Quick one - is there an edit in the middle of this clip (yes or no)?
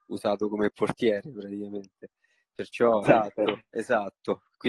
yes